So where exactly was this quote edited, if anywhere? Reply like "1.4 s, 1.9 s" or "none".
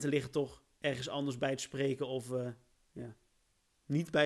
none